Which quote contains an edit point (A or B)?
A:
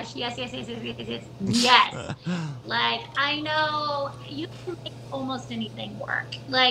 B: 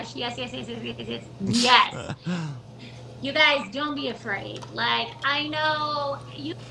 A